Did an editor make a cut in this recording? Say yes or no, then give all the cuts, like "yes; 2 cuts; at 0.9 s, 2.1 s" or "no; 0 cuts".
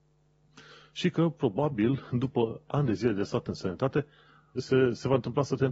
yes; 1 cut; at 4.6 s